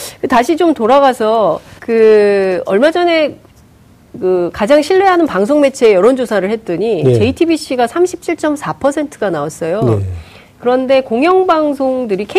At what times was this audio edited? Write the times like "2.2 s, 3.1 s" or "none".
1.8 s